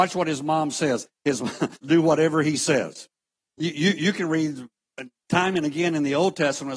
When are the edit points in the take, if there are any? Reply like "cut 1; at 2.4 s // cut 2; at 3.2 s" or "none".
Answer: cut 1; at 1.8 s // cut 2; at 3.5 s